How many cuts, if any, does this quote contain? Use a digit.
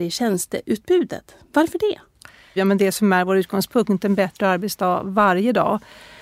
1